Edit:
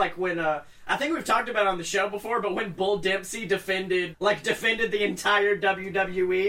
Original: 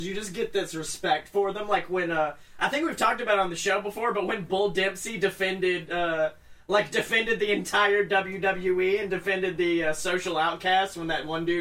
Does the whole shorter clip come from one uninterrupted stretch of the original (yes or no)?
no